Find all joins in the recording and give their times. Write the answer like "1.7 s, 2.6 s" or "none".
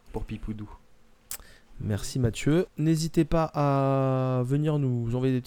2.7 s